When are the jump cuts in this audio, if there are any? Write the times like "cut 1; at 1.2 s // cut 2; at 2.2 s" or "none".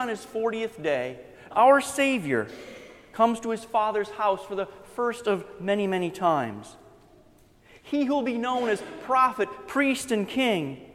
cut 1; at 1.5 s